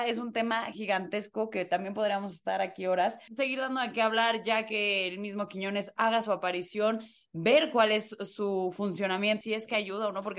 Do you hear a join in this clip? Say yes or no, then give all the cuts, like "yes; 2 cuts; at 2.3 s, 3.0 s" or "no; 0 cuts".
yes; 2 cuts; at 3.3 s, 9.4 s